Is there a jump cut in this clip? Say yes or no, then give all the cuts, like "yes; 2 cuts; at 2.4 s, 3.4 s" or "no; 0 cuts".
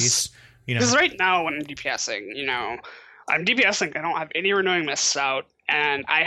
no; 0 cuts